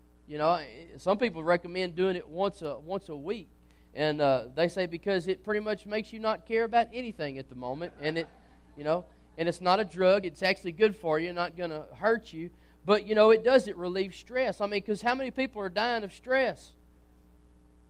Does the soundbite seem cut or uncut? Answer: uncut